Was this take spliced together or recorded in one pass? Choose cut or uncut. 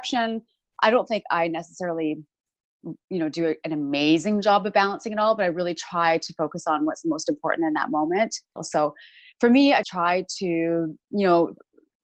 cut